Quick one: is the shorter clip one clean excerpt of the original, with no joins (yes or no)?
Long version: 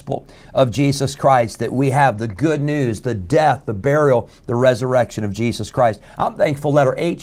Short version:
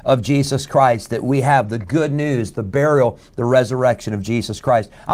no